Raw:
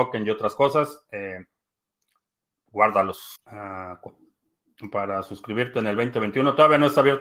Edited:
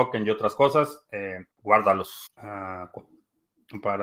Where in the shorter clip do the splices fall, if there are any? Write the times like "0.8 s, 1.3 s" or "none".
1.5 s